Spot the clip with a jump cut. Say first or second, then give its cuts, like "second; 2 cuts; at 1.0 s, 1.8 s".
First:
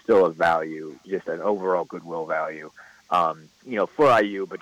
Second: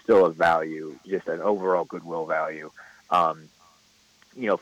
first; 1 cut; at 3.5 s